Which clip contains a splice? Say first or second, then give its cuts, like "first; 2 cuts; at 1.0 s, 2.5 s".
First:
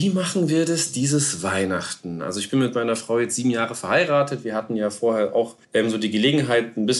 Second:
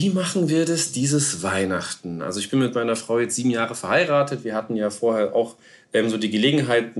first; 1 cut; at 5.6 s